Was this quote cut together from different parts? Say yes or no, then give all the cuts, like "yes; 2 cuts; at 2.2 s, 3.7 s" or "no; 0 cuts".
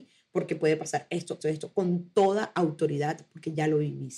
yes; 1 cut; at 1.4 s